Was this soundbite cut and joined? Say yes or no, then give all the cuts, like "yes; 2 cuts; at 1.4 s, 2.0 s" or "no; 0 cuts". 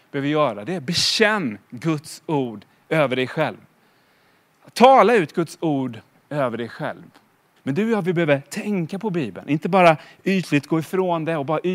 yes; 1 cut; at 7.6 s